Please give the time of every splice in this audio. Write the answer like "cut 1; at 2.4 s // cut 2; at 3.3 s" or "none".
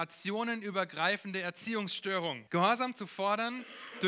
cut 1; at 2.5 s